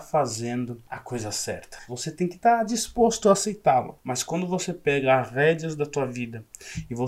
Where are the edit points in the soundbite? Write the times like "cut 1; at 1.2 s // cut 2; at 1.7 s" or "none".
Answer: cut 1; at 1.9 s // cut 2; at 4.0 s